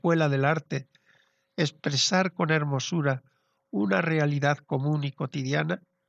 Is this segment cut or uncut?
uncut